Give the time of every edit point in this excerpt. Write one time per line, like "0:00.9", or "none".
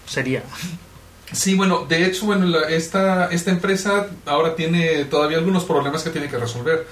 none

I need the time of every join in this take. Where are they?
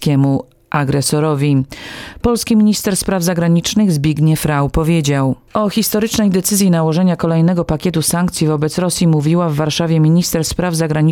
0:05.5

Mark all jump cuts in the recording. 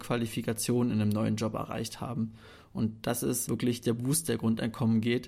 none

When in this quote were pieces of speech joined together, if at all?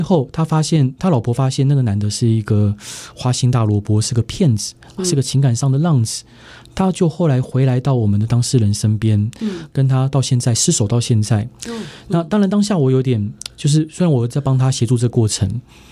none

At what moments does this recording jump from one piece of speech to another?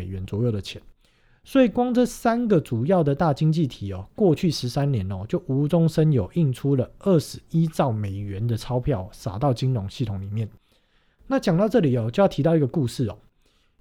none

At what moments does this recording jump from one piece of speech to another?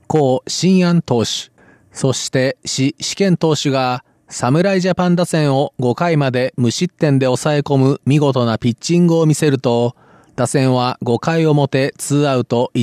none

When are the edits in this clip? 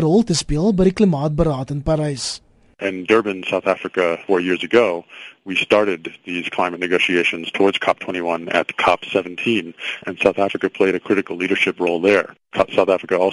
none

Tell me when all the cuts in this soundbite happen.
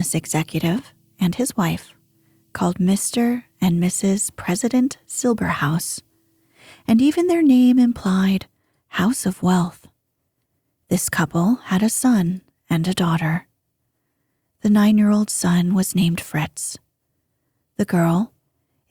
none

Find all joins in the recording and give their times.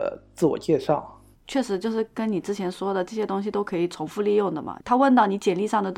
0:01.3

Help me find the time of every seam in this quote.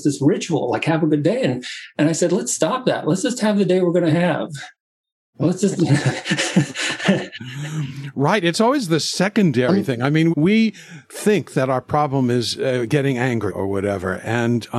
0:10.3
0:13.5

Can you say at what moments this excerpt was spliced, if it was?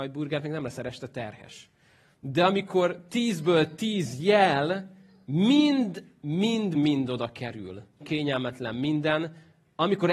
0:06.7
0:08.0

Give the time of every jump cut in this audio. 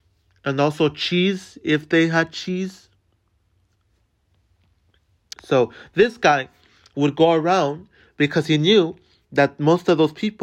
0:05.3

